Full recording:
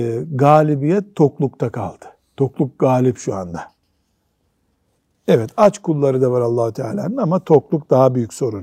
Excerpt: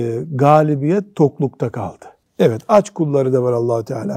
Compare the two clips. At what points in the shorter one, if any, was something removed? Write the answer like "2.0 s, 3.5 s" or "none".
2.2 s